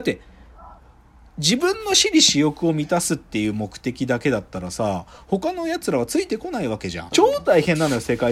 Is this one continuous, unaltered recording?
no; 1 cut; at 7.1 s

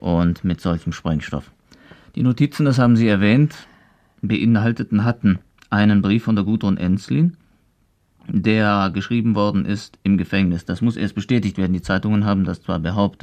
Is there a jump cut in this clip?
no; 0 cuts

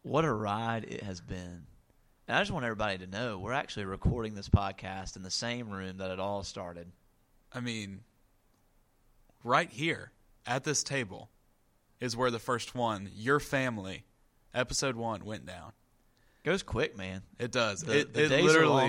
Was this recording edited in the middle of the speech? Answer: no; 0 cuts

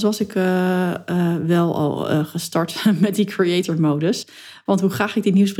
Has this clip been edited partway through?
no; 0 cuts

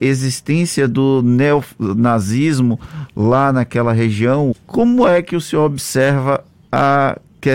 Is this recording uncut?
no; 1 cut; at 4.5 s

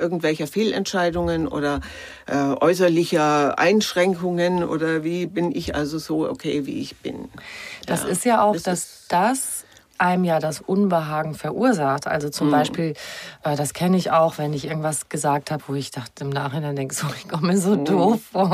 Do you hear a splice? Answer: no; 0 cuts

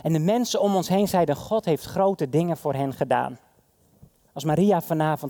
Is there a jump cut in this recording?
yes; 1 cut; at 4.3 s

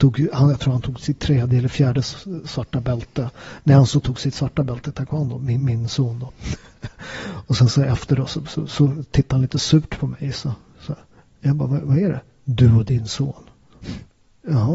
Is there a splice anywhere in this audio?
no; 0 cuts

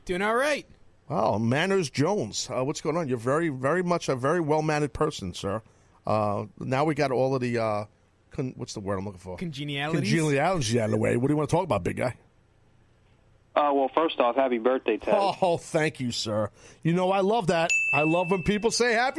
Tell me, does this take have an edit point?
yes; 1 cut; at 8.6 s

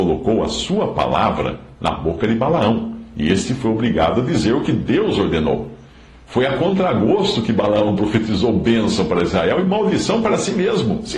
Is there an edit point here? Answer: no; 0 cuts

